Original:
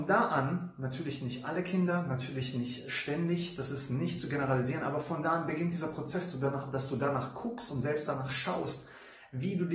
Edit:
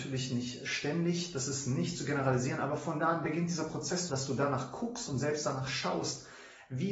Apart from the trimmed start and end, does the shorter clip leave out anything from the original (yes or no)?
yes